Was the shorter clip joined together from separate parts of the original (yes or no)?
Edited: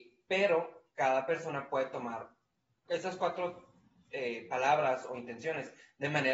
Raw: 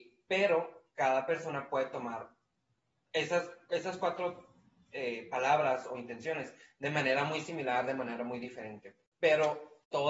yes